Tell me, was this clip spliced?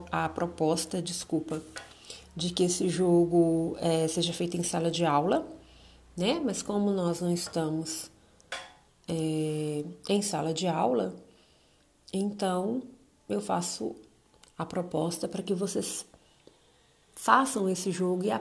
no; 0 cuts

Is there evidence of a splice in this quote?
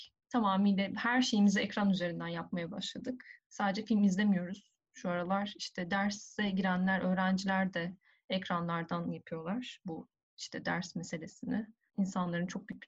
yes; 1 cut; at 11.9 s

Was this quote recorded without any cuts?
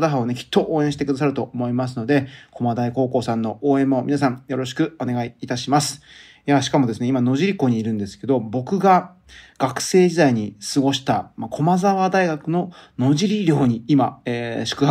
yes; 0 cuts

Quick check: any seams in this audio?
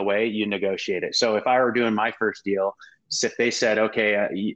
no; 0 cuts

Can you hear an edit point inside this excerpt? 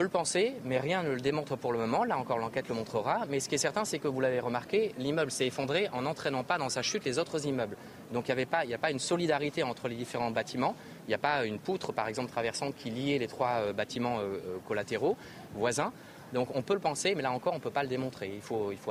no; 0 cuts

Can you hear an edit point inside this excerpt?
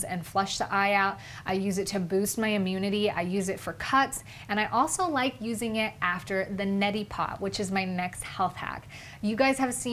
no; 0 cuts

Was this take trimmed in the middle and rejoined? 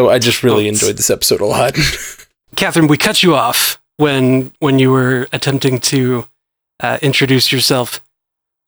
no; 0 cuts

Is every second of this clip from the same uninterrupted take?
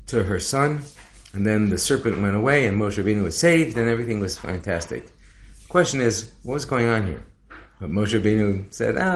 yes; 0 cuts

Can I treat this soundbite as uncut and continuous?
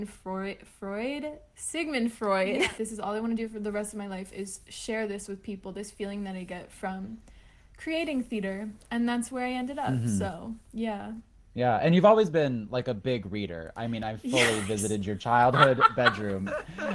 no; 1 cut; at 2.8 s

